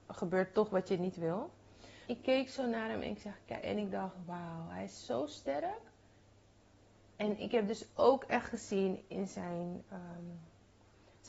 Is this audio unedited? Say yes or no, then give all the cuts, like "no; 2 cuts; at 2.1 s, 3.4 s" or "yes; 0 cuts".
no; 1 cut; at 2.1 s